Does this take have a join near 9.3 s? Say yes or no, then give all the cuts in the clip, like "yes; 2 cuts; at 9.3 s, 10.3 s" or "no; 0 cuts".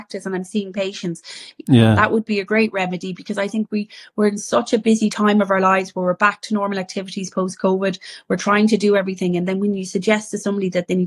no; 1 cut; at 1.6 s